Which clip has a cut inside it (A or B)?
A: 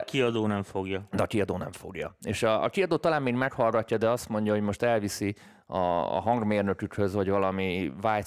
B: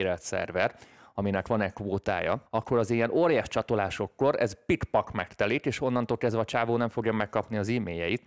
B